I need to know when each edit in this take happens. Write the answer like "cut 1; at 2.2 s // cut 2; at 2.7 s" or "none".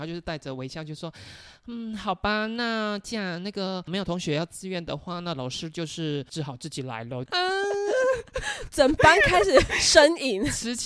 cut 1; at 7.3 s